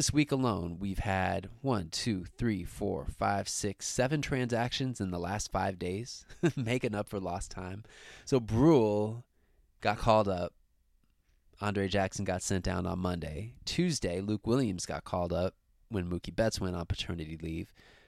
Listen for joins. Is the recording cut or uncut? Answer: uncut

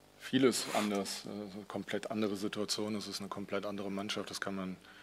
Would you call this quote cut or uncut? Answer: uncut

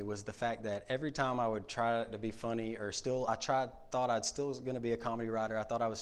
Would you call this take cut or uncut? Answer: uncut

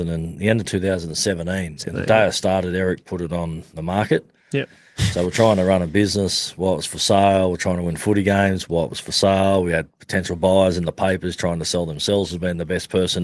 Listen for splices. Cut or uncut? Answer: uncut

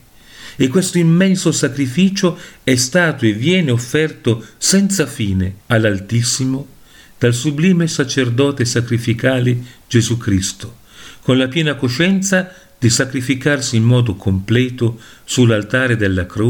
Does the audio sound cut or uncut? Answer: cut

